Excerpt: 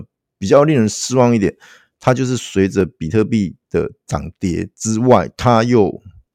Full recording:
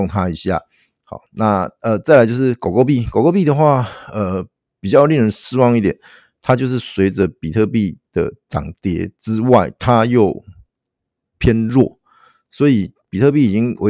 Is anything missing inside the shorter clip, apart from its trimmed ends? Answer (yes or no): no